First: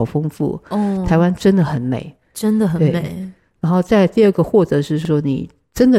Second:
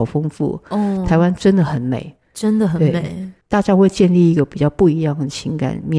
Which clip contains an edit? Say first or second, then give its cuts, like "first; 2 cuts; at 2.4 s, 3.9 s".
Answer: second; 1 cut; at 3.4 s